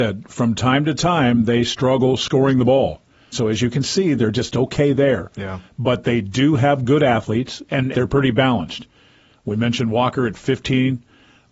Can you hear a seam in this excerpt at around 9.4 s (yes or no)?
no